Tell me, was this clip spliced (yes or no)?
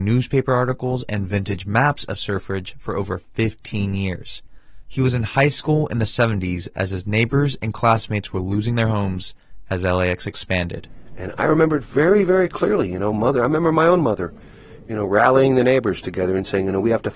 no